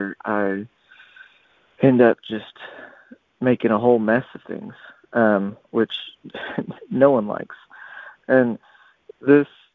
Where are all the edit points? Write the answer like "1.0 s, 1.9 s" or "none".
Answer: 8.2 s